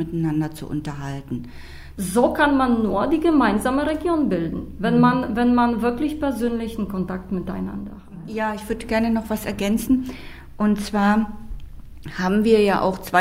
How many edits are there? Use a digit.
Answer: 1